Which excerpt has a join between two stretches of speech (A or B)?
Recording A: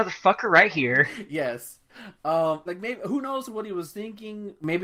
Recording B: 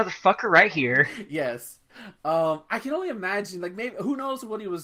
A